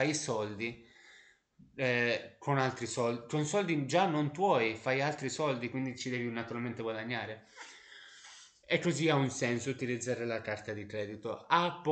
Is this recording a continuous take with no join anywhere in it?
yes; 0 cuts

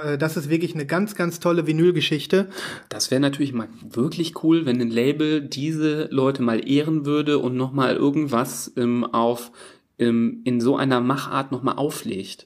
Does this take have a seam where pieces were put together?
no; 0 cuts

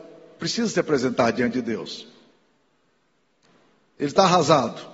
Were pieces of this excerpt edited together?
no; 0 cuts

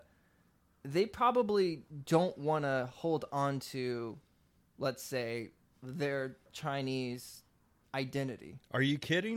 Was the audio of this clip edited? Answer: no; 0 cuts

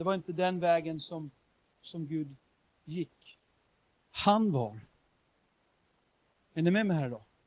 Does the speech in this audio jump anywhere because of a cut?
yes; 1 cut; at 4.0 s

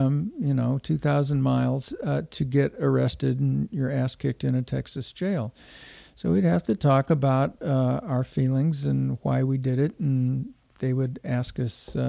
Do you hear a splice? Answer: no; 0 cuts

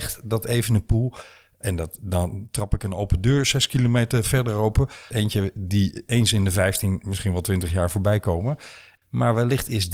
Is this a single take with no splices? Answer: no; 2 cuts; at 5.1 s, 9.0 s

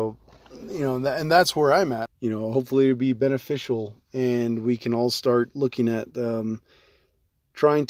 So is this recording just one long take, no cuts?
no; 1 cut; at 2.1 s

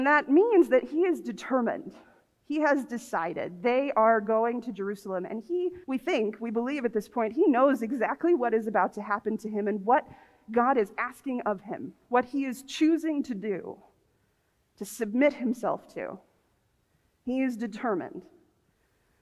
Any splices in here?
yes; 1 cut; at 5.8 s

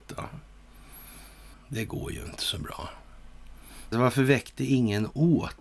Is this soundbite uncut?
no; 2 cuts; at 1.5 s, 3.9 s

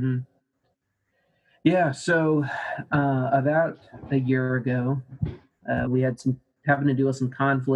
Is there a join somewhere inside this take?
yes; 1 cut; at 5.9 s

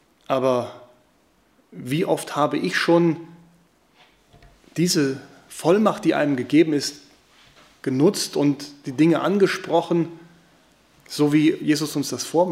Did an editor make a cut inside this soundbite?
no; 0 cuts

